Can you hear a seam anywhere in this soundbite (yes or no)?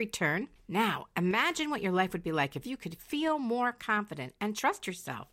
no